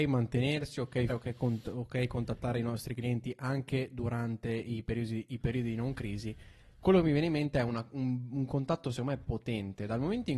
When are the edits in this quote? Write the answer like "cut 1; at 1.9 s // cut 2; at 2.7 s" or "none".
cut 1; at 1.1 s